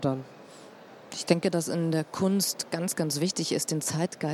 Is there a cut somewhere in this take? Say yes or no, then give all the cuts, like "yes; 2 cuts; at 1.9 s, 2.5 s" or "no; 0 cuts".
no; 0 cuts